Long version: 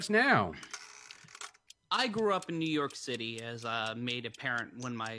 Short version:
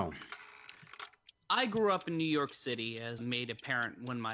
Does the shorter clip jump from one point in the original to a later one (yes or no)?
yes